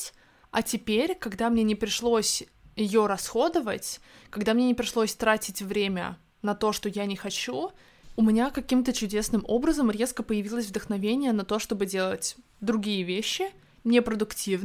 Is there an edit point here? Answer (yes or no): no